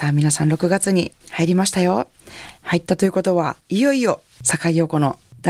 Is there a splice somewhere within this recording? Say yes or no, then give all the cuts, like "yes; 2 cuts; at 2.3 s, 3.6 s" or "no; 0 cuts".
yes; 1 cut; at 3.6 s